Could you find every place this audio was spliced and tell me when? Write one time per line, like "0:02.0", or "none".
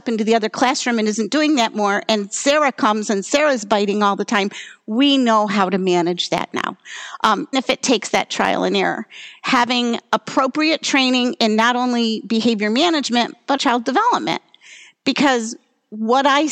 0:07.5
0:13.6